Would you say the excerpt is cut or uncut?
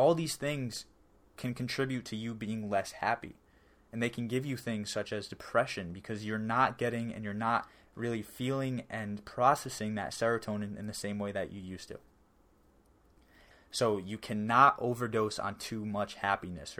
cut